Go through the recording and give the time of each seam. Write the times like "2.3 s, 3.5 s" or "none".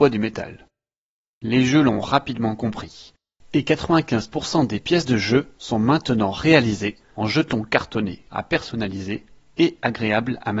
1.2 s, 8.3 s